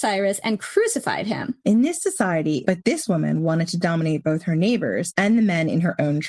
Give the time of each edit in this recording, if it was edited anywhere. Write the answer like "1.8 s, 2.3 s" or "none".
1.6 s, 2.6 s